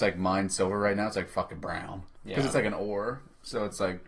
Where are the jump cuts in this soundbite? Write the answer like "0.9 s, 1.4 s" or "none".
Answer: 2.2 s